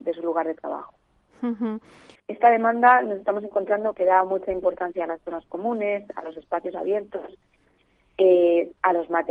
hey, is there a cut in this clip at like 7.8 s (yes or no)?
no